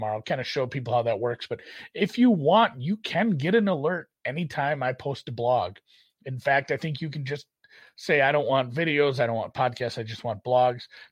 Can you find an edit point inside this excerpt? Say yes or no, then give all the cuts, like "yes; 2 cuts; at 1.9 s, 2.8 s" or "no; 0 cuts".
no; 0 cuts